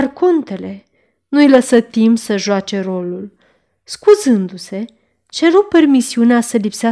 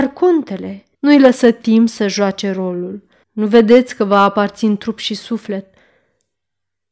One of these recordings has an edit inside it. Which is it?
second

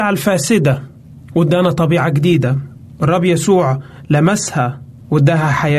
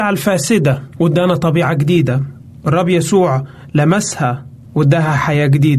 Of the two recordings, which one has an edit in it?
second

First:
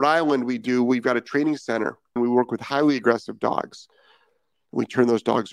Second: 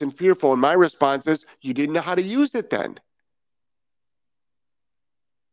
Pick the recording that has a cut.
first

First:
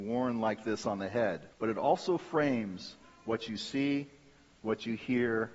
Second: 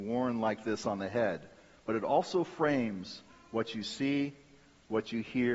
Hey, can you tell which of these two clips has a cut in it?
first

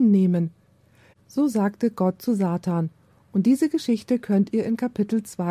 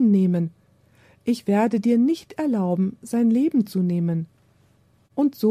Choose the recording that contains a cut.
first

